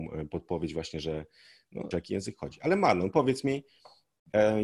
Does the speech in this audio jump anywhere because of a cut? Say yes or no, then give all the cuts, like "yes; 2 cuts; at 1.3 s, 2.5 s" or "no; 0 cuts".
yes; 1 cut; at 1.9 s